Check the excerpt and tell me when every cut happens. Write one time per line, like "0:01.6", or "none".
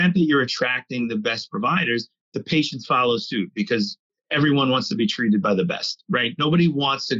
none